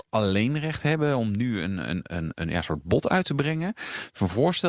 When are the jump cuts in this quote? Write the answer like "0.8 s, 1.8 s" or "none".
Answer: 2.0 s